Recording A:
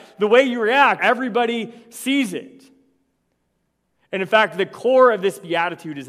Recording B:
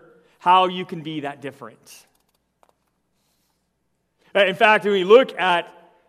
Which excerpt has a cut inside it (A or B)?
A